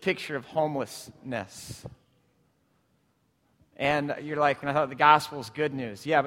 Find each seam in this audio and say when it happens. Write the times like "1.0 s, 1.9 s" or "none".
4.6 s